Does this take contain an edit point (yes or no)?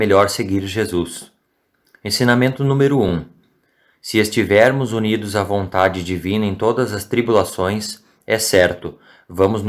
no